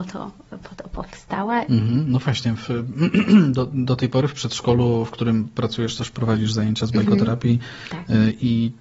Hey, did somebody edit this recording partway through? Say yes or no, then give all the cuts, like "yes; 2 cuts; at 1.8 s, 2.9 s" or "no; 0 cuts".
yes; 1 cut; at 1.7 s